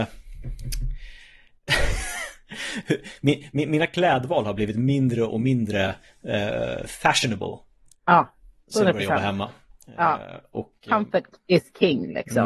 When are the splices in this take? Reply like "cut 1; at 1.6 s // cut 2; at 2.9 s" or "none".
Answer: none